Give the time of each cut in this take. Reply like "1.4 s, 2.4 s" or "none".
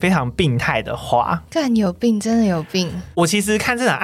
none